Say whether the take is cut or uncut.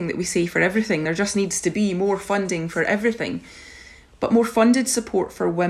uncut